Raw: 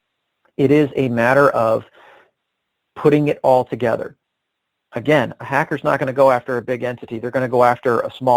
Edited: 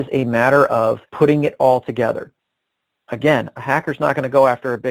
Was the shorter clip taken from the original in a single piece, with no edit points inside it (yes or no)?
no